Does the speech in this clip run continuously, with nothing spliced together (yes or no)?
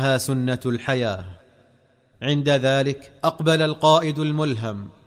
no